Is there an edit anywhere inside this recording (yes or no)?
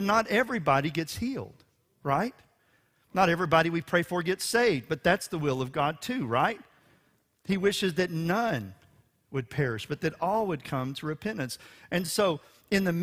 no